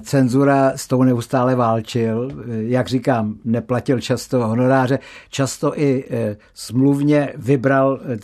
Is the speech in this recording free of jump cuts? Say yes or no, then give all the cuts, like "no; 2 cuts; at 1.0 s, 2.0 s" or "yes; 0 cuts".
yes; 0 cuts